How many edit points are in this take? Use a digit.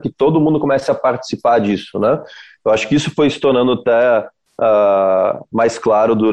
0